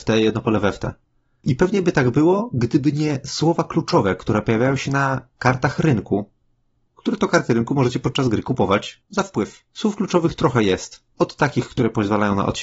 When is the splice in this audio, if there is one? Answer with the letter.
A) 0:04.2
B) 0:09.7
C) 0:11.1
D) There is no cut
B